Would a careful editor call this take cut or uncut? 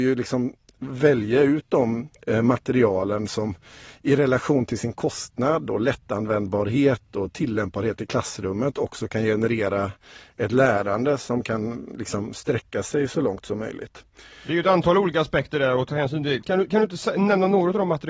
uncut